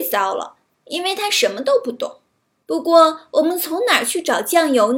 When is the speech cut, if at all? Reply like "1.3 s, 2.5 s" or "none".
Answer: 2.6 s